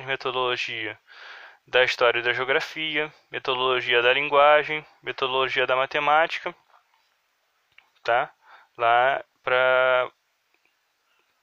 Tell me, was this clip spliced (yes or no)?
yes